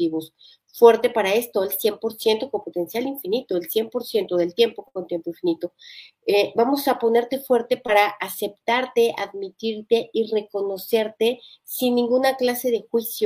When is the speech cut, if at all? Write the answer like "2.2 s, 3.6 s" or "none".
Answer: none